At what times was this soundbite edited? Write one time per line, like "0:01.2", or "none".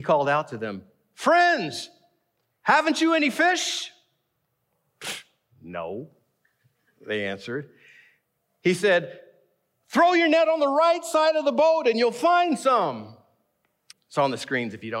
0:13.9

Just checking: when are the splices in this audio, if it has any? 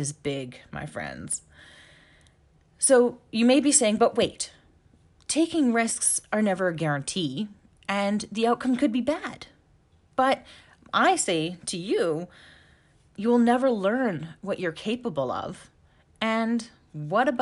0:13.1

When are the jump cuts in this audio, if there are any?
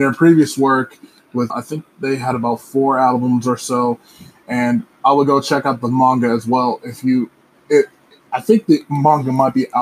0:01.5

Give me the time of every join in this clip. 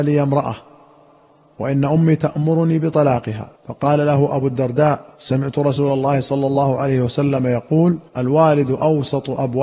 0:03.6
0:05.1
0:08.1

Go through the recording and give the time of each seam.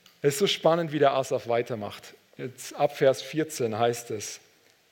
none

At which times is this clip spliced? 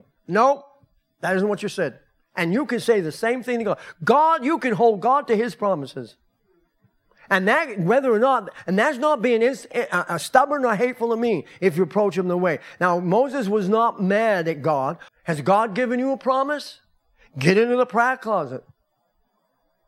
0:15.1

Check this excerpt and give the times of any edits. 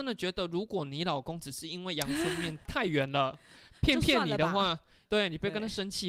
none

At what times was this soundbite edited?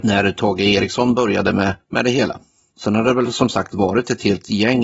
none

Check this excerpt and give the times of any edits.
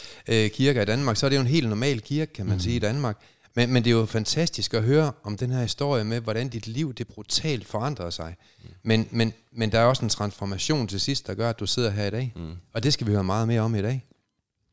none

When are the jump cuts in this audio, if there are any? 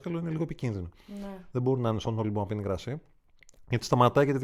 none

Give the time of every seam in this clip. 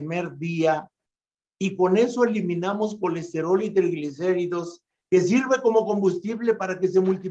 0:05.0

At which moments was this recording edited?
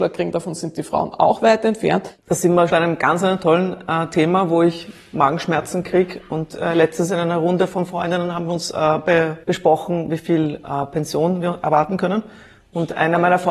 0:02.7
0:09.4

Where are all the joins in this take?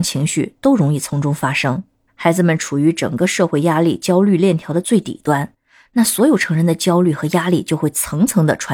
0:02.1

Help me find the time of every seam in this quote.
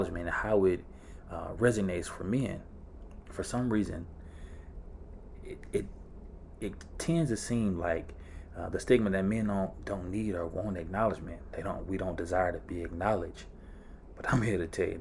none

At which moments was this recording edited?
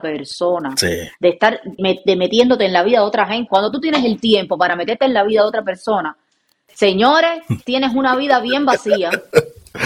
0:01.8
0:03.5

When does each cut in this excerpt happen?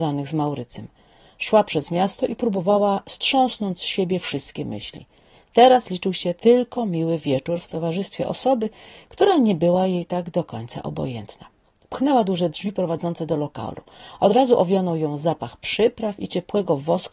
none

